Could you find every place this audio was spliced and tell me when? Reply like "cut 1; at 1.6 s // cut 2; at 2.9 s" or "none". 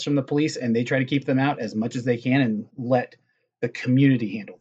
cut 1; at 2.7 s